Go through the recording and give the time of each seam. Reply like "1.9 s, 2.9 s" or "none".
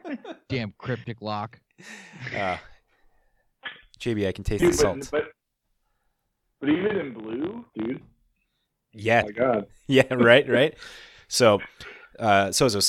7.7 s, 9.2 s